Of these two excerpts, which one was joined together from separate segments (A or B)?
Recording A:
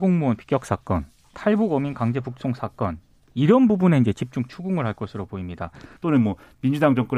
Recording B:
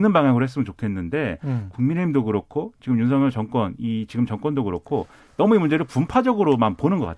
A